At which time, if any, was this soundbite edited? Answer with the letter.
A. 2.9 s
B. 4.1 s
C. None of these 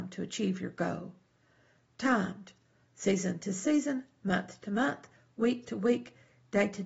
A